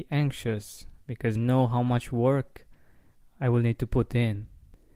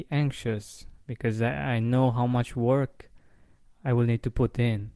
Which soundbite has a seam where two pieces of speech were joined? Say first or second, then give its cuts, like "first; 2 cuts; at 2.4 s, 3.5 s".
first; 1 cut; at 1.4 s